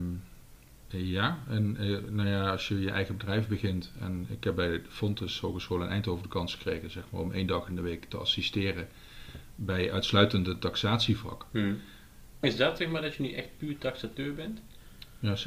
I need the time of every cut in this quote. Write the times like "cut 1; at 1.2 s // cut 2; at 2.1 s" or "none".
cut 1; at 12.4 s